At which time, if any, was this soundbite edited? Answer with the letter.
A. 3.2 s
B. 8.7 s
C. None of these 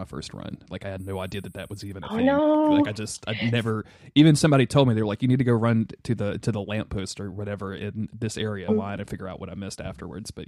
B